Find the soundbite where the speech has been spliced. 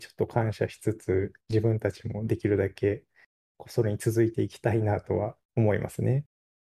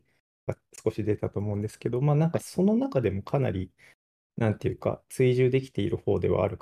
first; 1 cut; at 5.4 s

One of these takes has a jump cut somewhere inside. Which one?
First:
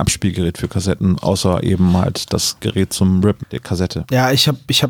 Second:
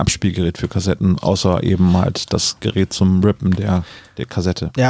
first; 1 cut; at 3.4 s

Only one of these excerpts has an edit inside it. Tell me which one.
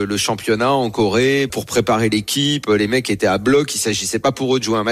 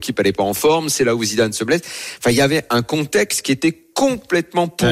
first; 1 cut; at 1.5 s

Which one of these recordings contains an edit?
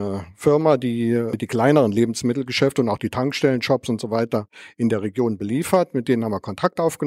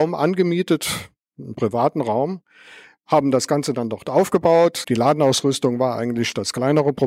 second; 1 cut; at 4.8 s

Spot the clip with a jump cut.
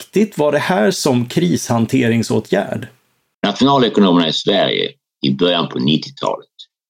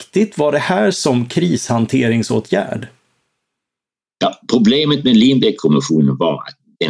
first; 1 cut; at 3.3 s

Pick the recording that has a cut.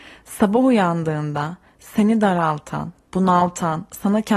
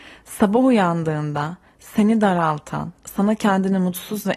second; 1 cut; at 3.0 s

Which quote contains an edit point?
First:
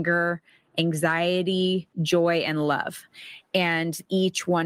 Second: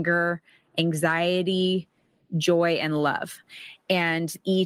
first; 1 cut; at 1.9 s

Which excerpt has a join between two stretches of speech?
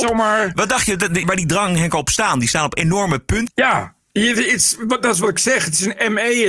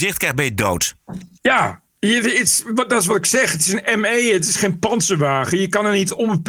first; 2 cuts; at 1.2 s, 3.5 s

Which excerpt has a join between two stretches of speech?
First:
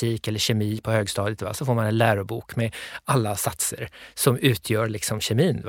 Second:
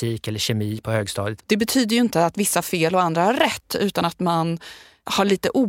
second; 1 cut; at 1.4 s

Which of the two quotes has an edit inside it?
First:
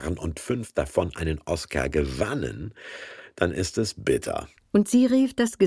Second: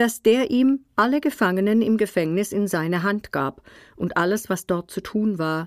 first; 1 cut; at 4.6 s

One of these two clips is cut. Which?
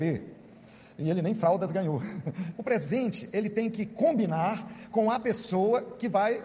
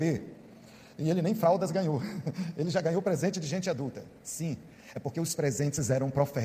first; 1 cut; at 2.5 s

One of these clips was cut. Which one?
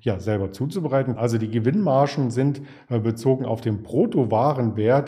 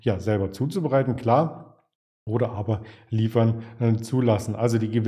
first; 1 cut; at 1.2 s

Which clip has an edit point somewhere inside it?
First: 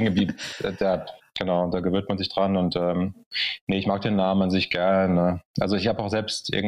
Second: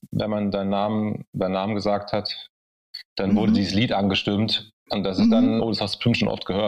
second; 2 cuts; at 3.1 s, 5.6 s

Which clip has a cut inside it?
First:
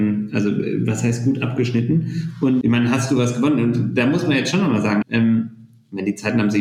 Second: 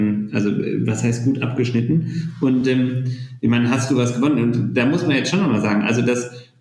first; 2 cuts; at 2.6 s, 5.0 s

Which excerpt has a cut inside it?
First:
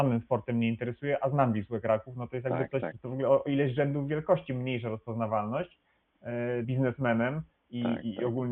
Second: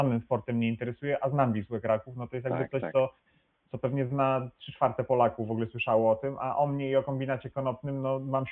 first; 2 cuts; at 2.9 s, 6.6 s

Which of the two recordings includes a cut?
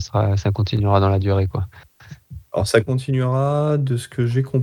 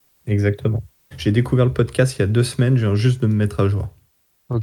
second; 1 cut; at 1.1 s

